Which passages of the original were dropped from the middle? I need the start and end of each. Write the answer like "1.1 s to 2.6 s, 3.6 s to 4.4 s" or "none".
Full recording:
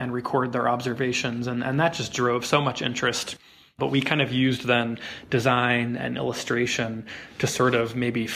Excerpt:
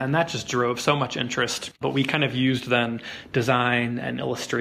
3.4 s to 3.7 s